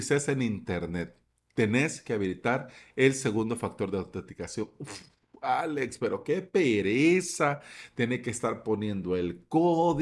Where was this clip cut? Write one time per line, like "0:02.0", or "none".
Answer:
none